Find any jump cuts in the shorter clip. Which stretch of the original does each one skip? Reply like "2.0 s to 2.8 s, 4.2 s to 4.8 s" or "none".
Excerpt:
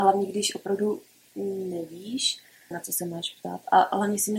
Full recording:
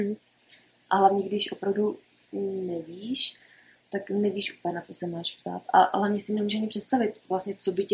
3.7 s to 4.7 s